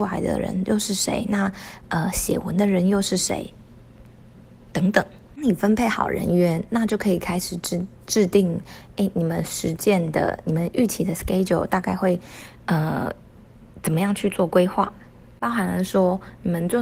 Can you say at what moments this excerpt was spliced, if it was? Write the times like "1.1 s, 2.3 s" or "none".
none

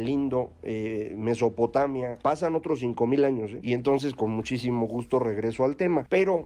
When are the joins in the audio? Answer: 3.6 s

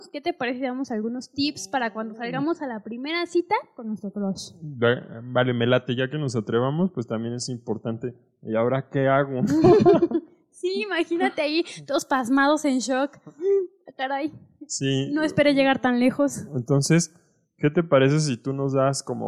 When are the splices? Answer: none

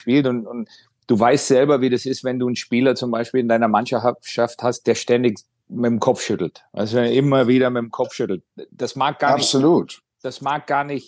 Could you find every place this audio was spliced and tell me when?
none

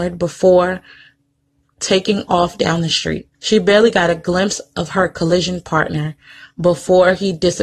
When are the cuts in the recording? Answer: 3.3 s

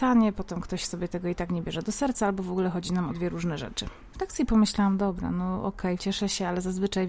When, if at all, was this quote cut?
4.1 s, 6.0 s

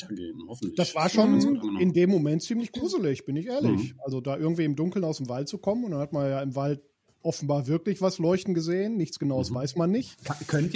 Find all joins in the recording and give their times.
none

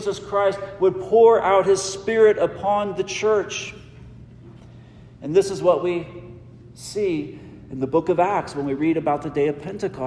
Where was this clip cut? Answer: none

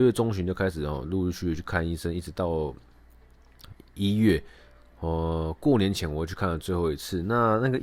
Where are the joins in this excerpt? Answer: none

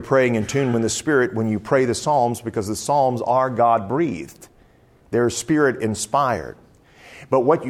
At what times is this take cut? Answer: none

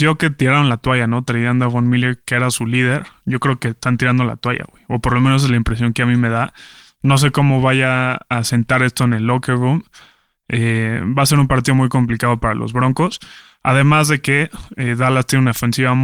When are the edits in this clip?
none

